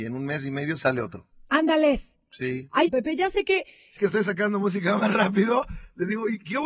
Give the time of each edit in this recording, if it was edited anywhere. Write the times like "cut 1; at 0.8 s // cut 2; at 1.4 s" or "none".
cut 1; at 2.9 s // cut 2; at 4.0 s